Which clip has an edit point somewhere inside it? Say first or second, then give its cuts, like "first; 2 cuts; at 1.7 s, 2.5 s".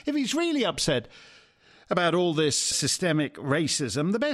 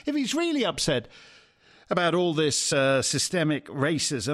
first; 1 cut; at 2.7 s